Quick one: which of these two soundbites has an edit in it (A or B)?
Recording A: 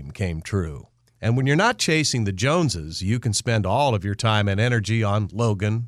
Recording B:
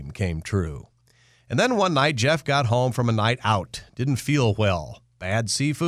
A